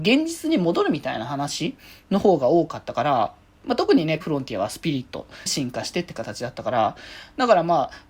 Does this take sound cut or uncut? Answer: cut